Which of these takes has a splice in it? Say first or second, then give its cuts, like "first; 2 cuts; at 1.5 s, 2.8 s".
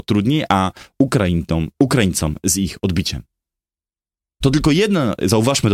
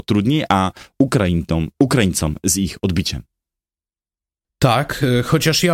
first; 1 cut; at 4.4 s